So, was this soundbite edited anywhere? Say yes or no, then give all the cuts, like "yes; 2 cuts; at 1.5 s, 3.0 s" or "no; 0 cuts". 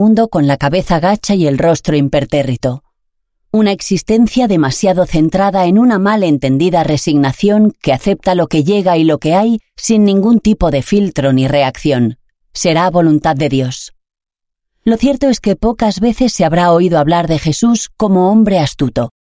no; 0 cuts